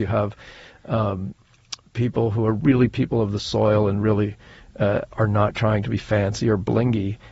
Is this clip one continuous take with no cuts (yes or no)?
yes